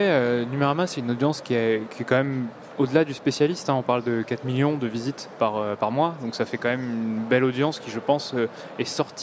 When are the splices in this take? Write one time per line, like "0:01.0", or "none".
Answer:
none